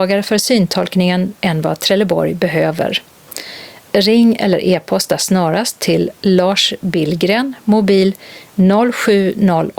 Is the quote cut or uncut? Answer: uncut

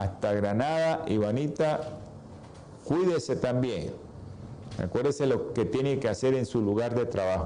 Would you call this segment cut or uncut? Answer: uncut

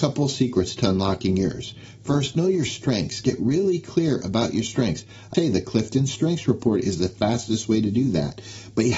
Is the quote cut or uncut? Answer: cut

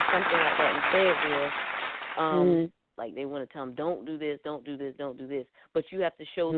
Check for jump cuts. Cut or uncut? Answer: cut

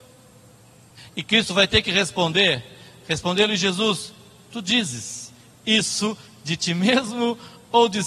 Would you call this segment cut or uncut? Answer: cut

